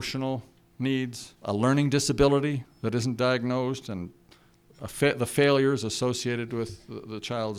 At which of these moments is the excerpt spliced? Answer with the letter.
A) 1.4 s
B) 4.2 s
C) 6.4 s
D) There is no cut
A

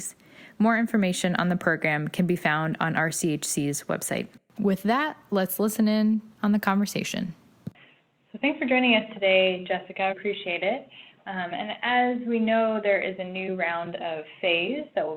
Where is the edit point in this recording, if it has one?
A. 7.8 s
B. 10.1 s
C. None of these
B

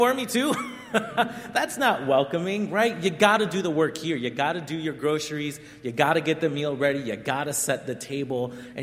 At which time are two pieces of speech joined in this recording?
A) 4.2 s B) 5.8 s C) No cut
C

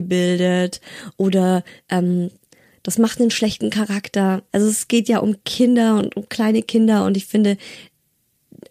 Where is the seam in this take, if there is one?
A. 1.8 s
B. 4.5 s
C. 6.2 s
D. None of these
B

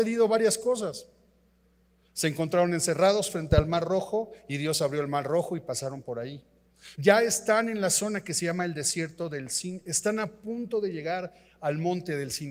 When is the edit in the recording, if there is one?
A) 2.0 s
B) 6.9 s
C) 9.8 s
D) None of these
B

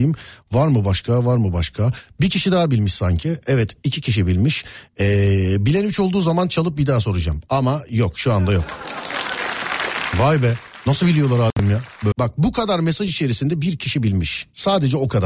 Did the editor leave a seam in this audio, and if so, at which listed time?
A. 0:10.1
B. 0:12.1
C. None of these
B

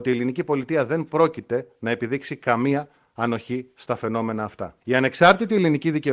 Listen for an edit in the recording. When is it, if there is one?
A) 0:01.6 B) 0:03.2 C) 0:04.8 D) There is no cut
C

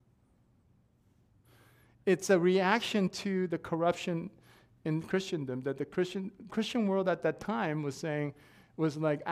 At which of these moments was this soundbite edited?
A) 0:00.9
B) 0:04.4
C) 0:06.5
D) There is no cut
C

